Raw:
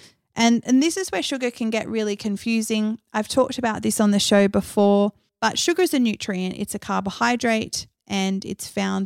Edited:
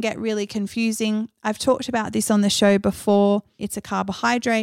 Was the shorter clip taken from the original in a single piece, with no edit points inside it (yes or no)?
no